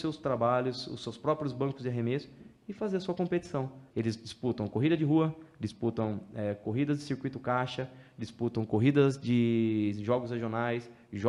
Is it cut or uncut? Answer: cut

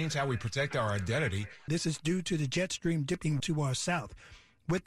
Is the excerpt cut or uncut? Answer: cut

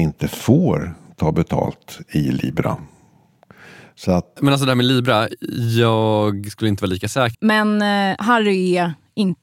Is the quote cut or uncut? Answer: cut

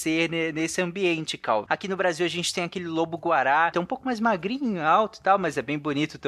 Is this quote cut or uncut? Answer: cut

